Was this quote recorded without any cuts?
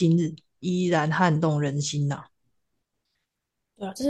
yes; 0 cuts

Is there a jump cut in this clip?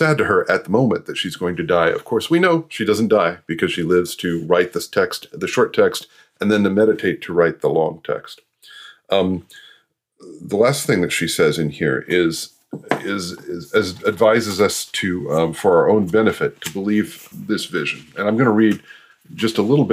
yes; 1 cut; at 17.3 s

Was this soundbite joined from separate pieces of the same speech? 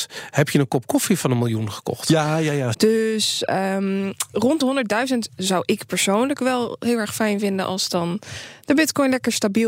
yes; 1 cut; at 2.7 s

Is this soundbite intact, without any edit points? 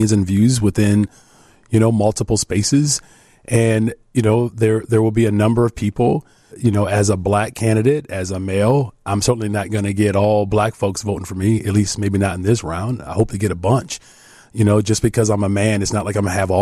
no; 1 cut; at 6.5 s

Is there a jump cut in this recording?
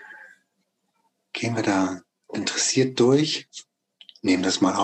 no; 0 cuts

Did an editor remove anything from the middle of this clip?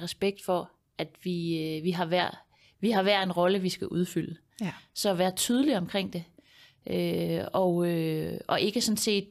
no; 0 cuts

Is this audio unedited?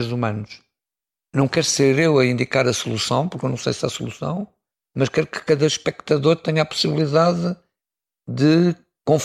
yes; 0 cuts

